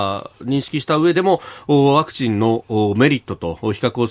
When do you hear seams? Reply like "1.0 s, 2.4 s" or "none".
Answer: 1.1 s